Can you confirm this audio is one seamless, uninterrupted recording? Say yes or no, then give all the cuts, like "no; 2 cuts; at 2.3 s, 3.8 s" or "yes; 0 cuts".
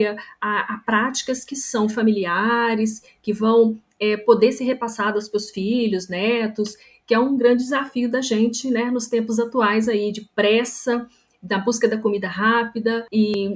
yes; 0 cuts